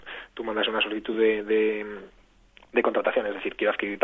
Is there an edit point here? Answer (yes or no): no